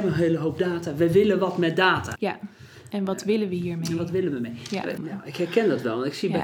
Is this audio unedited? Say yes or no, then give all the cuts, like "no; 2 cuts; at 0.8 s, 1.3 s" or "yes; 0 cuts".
no; 2 cuts; at 2.2 s, 5.0 s